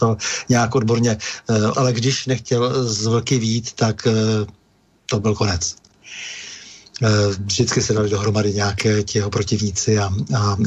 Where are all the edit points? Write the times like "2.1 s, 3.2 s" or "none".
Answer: 1.7 s